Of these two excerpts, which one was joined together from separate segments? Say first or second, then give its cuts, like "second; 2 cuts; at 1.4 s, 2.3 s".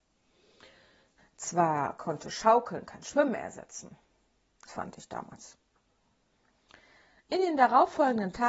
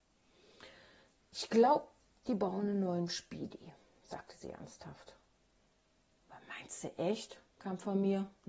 first; 2 cuts; at 1.2 s, 4.7 s